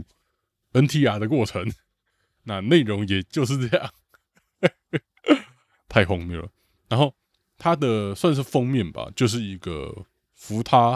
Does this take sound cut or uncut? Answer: uncut